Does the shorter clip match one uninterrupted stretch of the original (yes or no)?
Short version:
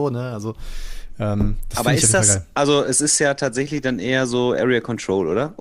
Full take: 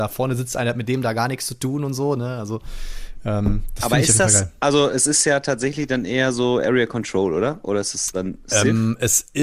yes